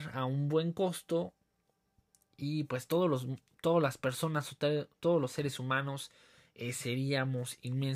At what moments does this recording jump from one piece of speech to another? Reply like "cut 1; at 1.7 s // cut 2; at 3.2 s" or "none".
none